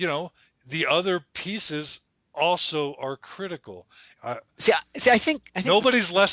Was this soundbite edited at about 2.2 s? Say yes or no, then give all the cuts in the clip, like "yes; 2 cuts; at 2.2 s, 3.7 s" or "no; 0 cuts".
no; 1 cut; at 4.2 s